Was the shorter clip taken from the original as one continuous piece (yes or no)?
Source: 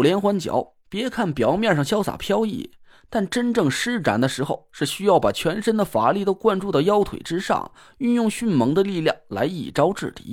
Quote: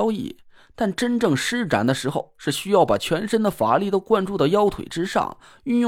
yes